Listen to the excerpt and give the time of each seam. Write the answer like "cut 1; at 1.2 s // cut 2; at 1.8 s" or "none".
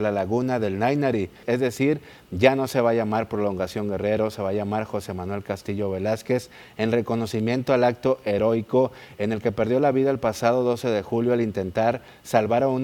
cut 1; at 1.4 s